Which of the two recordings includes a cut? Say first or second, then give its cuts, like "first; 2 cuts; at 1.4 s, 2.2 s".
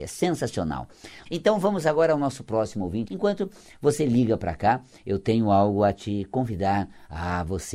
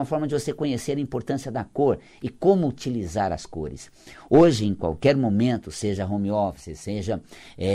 first; 2 cuts; at 1.3 s, 3.1 s